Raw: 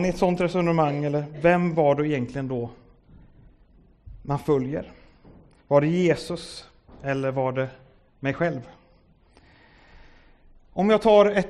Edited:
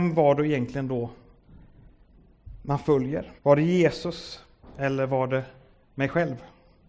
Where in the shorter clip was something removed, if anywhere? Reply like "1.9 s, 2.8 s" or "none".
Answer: 3.4 s